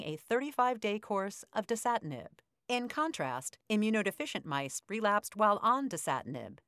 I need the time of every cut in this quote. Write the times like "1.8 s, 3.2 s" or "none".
none